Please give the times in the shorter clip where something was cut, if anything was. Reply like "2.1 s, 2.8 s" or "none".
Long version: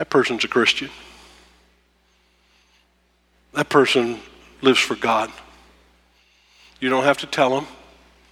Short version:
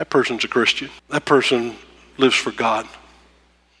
1.0 s

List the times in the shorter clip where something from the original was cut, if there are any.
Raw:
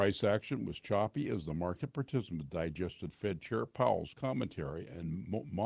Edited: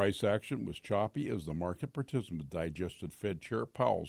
none

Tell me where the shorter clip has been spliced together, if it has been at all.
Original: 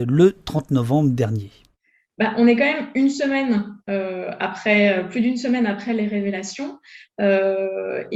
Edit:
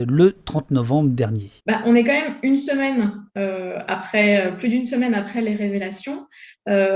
1.6 s

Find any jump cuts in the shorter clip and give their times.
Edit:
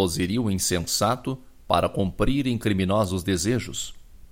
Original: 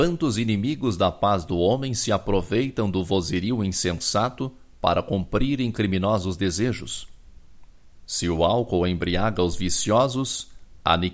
none

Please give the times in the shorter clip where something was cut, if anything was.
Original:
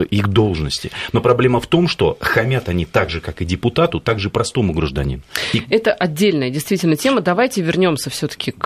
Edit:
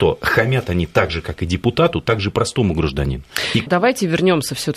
3.7 s

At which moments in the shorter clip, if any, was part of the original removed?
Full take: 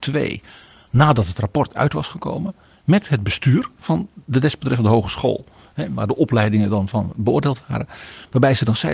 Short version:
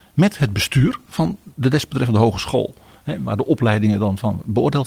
none

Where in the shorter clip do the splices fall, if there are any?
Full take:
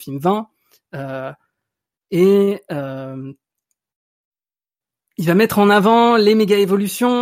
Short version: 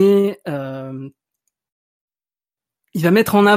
none

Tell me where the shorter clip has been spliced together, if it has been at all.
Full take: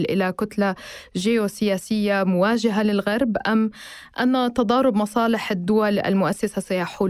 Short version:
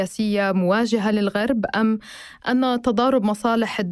none

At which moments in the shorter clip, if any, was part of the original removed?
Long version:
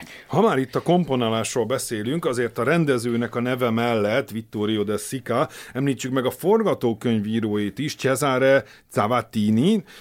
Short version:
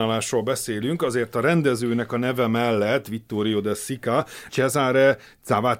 4.5 s

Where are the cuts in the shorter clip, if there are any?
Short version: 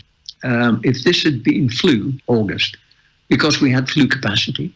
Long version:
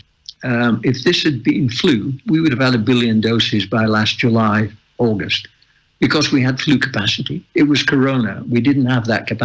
2.2 s

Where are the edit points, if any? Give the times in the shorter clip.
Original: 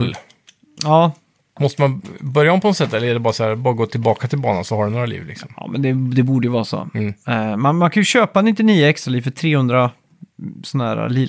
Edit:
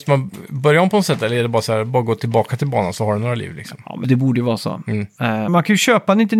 4.0 s, 5.5 s

